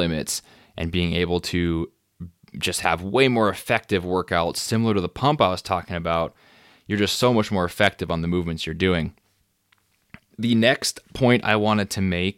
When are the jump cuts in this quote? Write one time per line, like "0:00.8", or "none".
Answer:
none